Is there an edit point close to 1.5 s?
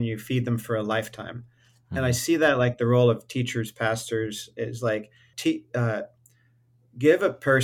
no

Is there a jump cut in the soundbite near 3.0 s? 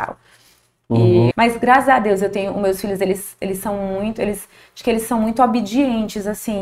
no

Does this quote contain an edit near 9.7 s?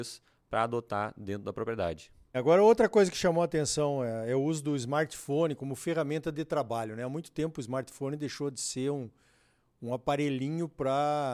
no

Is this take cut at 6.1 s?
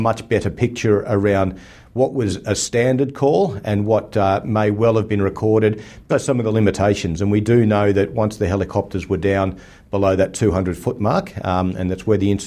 yes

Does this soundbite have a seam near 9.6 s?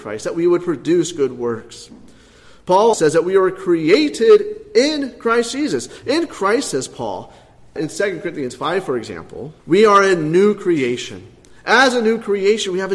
yes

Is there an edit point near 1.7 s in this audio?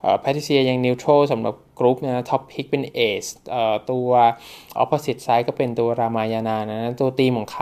no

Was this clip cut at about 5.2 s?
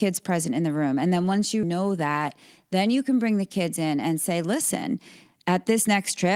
no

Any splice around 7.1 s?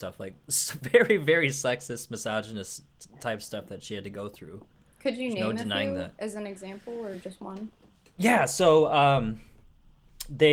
no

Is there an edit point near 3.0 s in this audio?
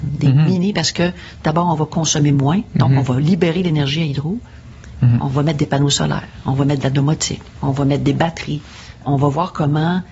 no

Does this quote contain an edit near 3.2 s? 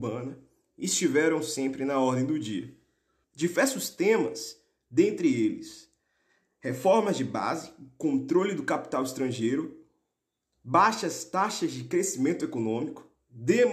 yes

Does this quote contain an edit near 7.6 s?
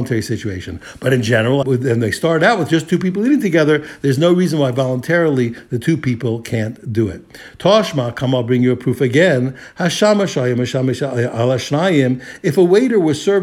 no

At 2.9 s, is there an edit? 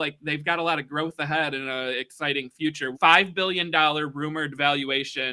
yes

